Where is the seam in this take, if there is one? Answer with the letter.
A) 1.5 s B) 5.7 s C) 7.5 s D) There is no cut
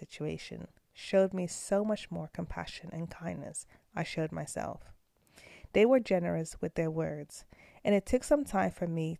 D